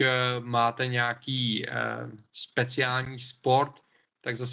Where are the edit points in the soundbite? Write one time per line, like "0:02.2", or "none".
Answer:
none